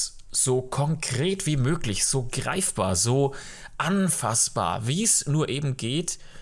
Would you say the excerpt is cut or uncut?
cut